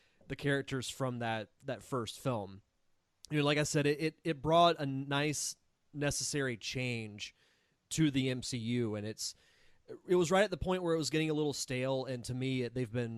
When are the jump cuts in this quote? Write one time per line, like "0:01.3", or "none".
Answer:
none